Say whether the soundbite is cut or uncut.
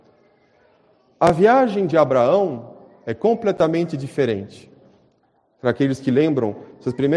uncut